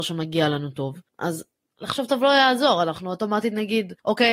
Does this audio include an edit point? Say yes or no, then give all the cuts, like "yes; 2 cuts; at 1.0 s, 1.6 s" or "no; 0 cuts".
no; 0 cuts